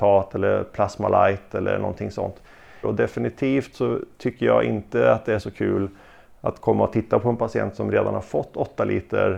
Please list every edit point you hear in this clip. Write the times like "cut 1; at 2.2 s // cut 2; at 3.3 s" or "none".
cut 1; at 2.8 s